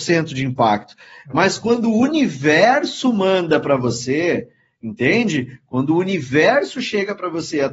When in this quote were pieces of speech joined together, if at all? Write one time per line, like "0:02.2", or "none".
none